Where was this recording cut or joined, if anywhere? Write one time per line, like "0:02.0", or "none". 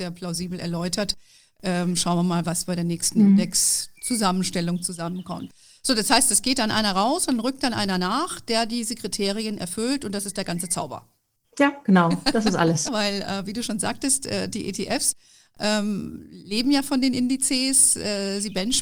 0:12.9